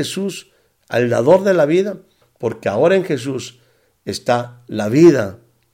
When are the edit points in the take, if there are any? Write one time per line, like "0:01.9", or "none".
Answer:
0:02.2